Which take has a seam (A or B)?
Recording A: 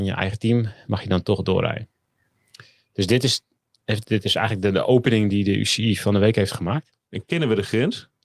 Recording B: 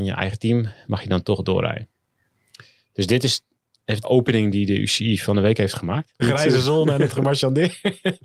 B